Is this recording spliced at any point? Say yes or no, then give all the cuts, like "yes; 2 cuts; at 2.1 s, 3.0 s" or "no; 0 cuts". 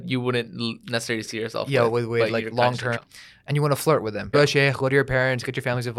yes; 2 cuts; at 3.0 s, 4.3 s